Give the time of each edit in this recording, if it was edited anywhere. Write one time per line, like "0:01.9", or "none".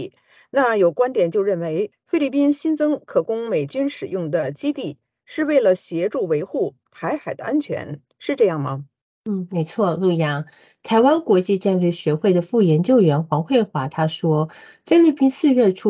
none